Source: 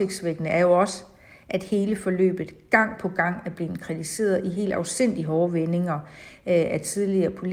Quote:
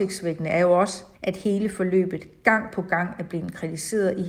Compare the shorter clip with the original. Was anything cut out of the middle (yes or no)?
yes